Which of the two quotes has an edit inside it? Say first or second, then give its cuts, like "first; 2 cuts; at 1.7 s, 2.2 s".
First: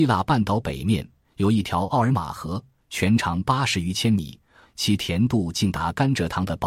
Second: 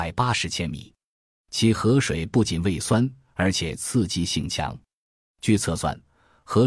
first; 1 cut; at 4.6 s